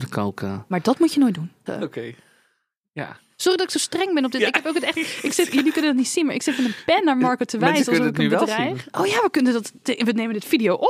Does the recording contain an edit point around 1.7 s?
yes; 1 cut; at 1.7 s

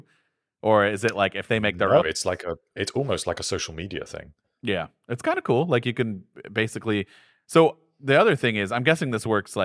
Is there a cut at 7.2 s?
no; 1 cut; at 2.0 s

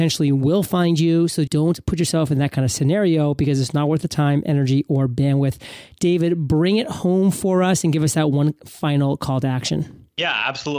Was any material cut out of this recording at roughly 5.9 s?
no; 1 cut; at 1.5 s

